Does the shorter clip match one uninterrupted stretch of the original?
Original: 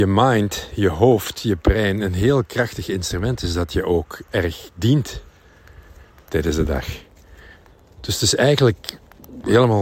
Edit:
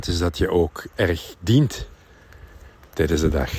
yes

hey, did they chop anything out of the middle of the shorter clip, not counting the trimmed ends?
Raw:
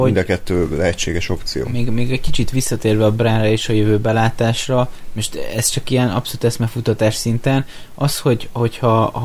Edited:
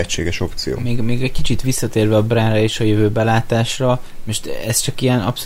no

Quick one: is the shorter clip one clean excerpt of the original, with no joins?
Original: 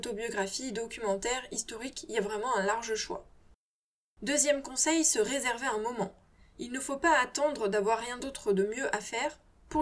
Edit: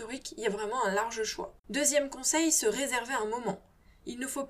no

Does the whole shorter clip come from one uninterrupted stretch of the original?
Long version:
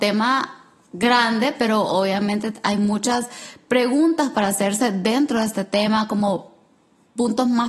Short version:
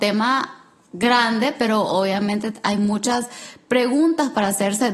yes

